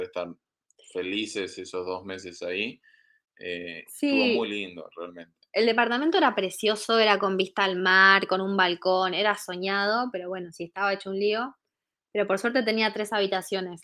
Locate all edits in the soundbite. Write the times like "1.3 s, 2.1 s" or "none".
3.9 s